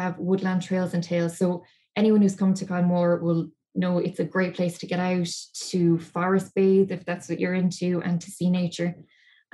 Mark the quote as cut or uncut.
uncut